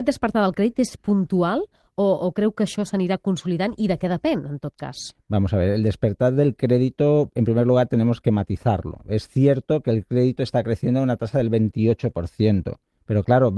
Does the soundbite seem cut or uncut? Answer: uncut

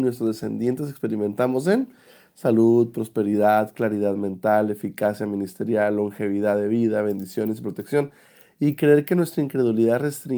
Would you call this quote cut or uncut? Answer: uncut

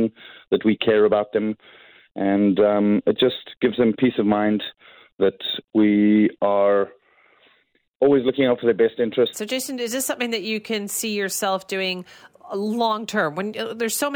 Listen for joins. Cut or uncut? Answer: cut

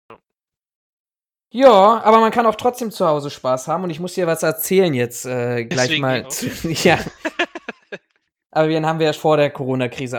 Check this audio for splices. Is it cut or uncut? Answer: cut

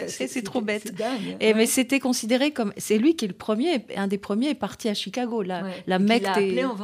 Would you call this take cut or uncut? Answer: uncut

